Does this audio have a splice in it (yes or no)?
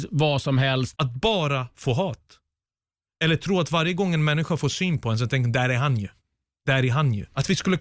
yes